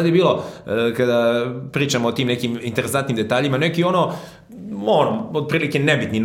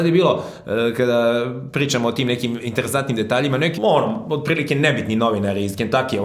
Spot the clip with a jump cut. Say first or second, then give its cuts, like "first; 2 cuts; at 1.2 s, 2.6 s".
second; 1 cut; at 3.8 s